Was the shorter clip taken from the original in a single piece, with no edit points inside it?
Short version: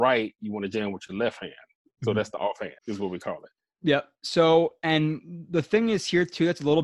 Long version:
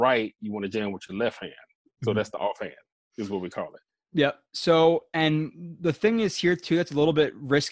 no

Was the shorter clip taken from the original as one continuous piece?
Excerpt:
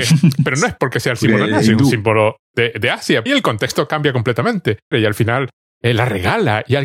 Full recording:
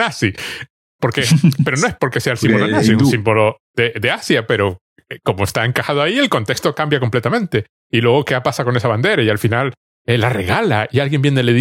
no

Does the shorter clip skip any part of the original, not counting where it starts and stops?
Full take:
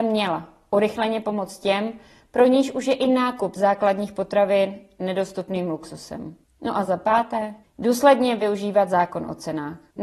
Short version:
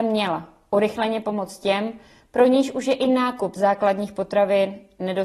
no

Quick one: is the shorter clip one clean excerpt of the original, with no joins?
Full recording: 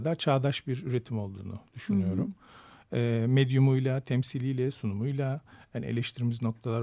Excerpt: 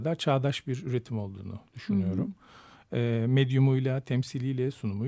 yes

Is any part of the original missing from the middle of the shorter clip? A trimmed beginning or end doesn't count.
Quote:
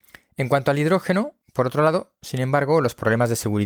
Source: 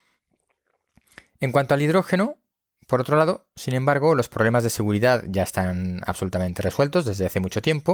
yes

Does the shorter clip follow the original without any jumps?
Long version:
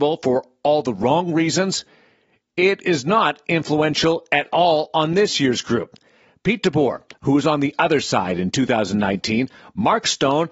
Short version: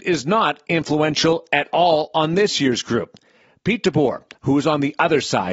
yes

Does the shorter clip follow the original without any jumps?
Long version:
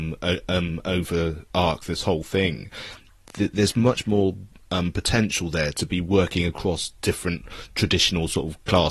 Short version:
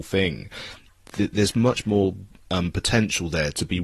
yes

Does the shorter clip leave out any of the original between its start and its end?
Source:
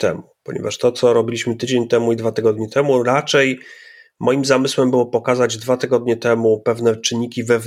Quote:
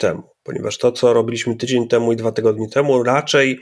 no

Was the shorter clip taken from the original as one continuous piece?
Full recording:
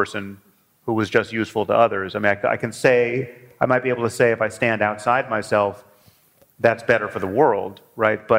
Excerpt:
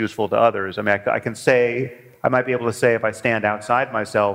yes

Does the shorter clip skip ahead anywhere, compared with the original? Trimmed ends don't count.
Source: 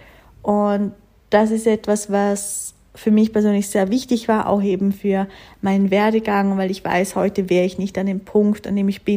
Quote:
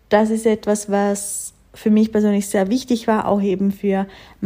no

